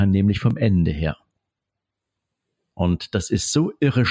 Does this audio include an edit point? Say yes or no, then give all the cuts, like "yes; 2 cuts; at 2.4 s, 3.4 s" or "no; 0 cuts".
yes; 1 cut; at 2.7 s